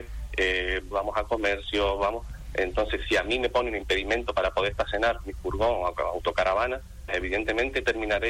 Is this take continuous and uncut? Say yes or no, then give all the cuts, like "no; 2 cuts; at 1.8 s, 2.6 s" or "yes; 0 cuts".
no; 2 cuts; at 0.9 s, 7.1 s